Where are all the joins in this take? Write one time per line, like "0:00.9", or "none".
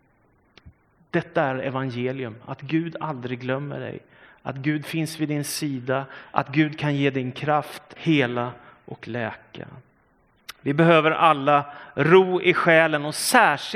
0:08.0